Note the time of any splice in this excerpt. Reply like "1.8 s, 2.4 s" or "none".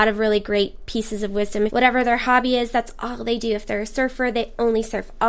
1.7 s